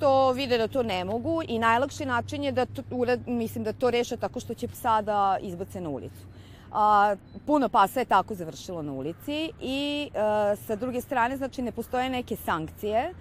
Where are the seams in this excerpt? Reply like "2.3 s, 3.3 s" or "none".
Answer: none